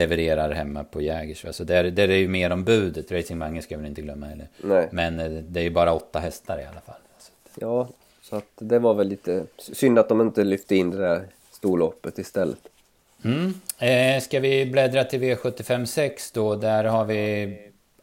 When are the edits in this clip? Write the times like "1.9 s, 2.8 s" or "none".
none